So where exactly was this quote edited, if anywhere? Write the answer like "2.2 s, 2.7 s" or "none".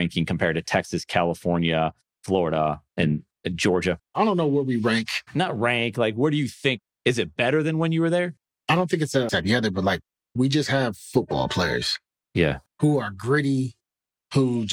9.3 s